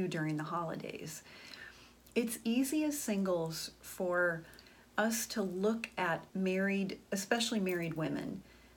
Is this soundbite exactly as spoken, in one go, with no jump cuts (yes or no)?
no